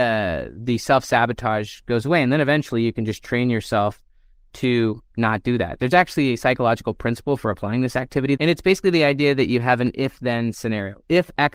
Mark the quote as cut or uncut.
cut